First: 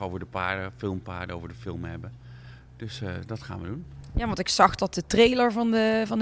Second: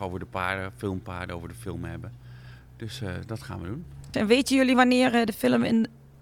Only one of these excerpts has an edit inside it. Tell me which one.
second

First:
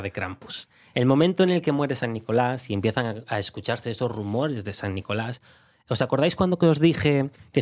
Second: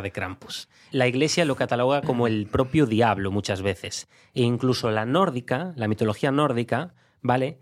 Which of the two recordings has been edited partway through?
second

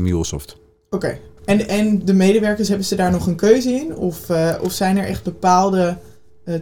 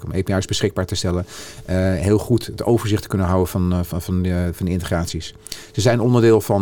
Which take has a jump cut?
first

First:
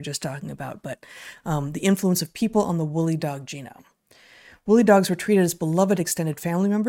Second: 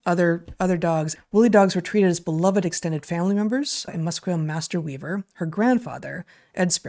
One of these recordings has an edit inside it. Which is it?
second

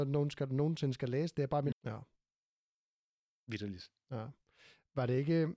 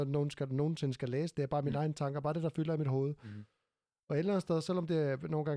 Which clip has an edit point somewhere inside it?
first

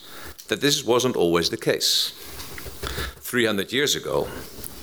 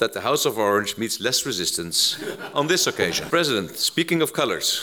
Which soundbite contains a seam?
second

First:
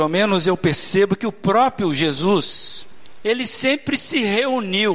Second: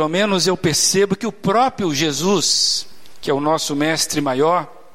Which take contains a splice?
first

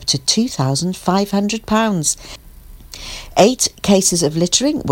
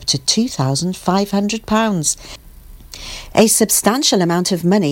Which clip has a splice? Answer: second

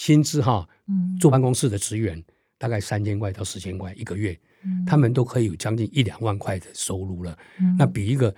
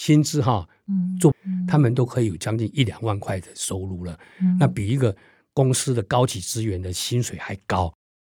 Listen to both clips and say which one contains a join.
second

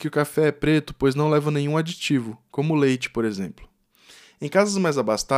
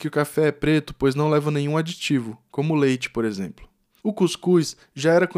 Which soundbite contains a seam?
second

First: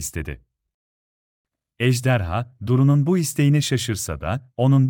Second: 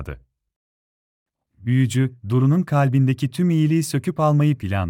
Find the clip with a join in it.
second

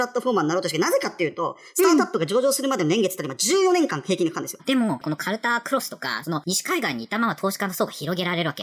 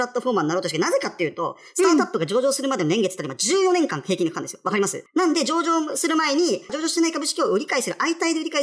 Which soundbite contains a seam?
first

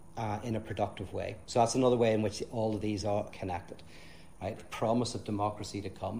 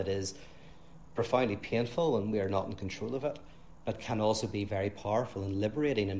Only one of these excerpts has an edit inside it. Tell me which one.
first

